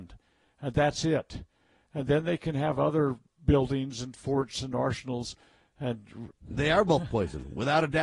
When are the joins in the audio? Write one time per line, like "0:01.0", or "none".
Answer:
0:06.3